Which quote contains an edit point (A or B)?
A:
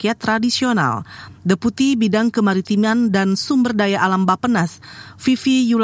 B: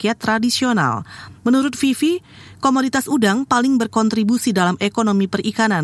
B